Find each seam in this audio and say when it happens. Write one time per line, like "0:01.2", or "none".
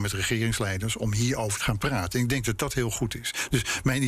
0:01.6